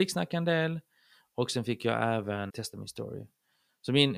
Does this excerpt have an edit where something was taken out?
yes; 1 cut; at 2.5 s

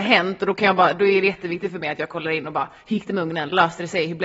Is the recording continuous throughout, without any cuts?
yes; 0 cuts

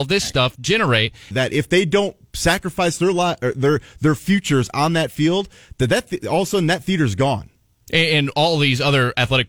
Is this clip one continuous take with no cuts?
no; 1 cut; at 1.3 s

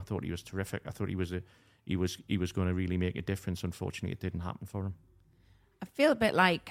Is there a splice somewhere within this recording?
no; 0 cuts

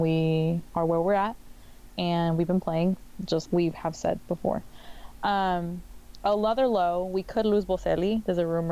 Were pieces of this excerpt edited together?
yes; 1 cut; at 3.5 s

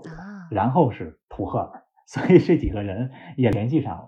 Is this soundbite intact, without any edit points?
yes; 0 cuts

